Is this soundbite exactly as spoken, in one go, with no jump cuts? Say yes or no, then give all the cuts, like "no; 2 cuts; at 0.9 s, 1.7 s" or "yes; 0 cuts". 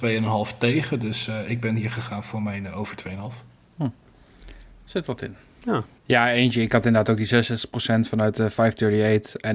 no; 1 cut; at 6.0 s